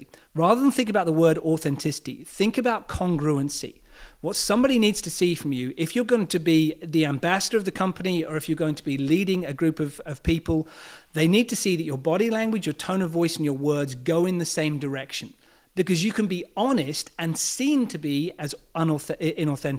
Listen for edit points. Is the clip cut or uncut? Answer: cut